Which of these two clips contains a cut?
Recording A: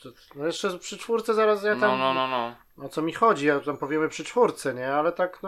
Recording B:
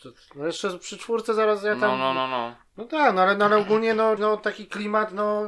B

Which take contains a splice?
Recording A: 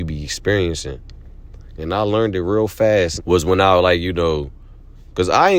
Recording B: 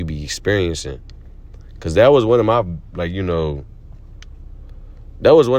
A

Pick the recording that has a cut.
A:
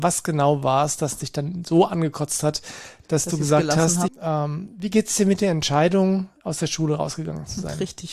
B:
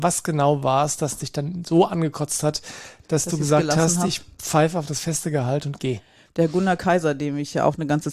A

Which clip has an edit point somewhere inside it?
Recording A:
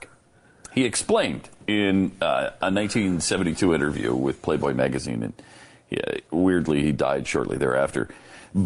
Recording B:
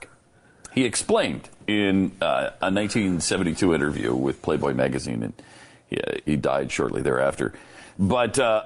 B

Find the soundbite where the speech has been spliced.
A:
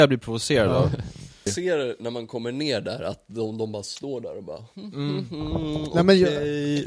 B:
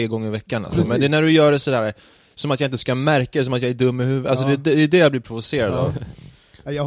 A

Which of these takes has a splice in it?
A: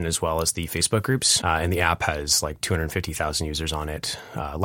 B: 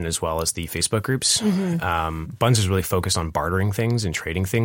A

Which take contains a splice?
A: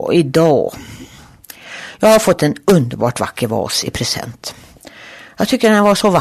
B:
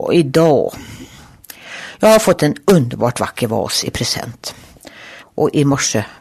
B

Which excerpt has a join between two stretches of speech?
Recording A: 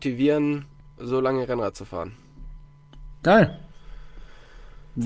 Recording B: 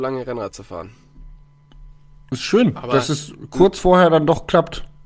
A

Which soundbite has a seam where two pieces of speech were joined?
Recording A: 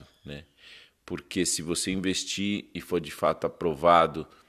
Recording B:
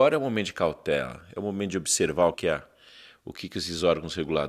B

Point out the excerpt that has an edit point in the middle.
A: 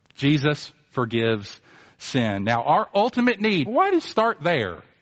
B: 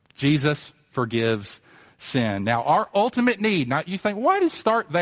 A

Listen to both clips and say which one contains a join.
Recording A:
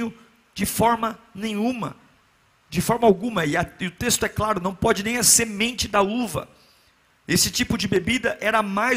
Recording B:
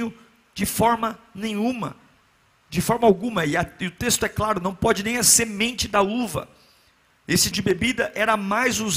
B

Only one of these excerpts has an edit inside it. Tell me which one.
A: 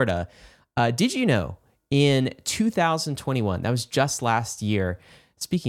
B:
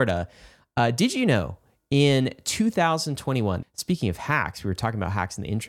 B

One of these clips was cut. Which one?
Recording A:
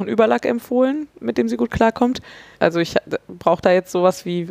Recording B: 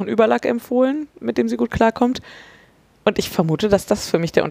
A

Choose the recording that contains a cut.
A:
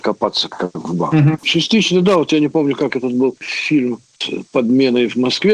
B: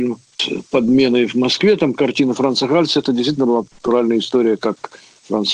A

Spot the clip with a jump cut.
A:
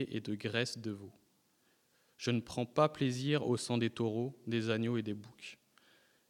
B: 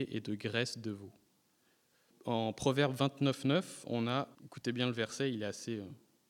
B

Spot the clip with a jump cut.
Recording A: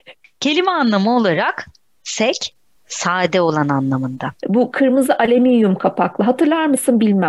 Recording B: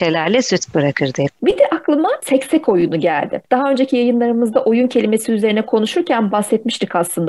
A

